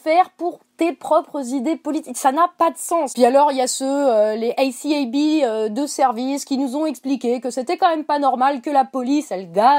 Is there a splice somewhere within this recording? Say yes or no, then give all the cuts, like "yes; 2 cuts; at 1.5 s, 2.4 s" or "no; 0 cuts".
no; 0 cuts